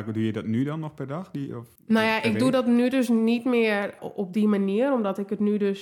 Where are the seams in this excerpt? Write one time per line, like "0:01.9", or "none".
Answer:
0:01.8
0:04.0